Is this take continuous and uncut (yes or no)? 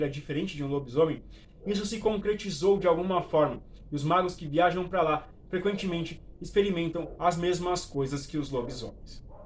yes